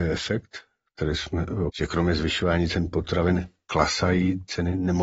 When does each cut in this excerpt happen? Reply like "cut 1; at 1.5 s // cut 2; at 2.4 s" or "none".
cut 1; at 1.7 s